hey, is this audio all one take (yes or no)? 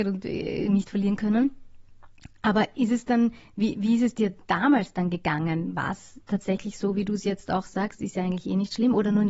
yes